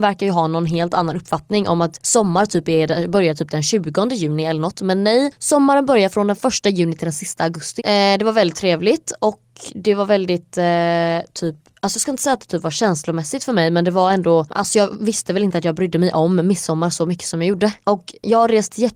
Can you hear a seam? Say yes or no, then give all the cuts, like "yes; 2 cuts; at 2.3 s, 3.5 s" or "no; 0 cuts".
yes; 2 cuts; at 7.8 s, 17.8 s